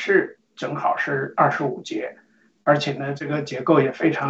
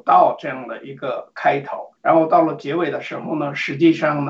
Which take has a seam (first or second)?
second